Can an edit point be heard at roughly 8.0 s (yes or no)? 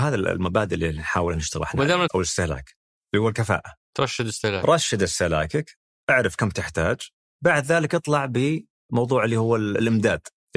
no